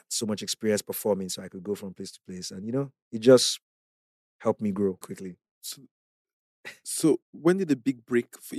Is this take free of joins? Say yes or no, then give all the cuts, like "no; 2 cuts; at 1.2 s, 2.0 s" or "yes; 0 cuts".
no; 2 cuts; at 5.0 s, 7.2 s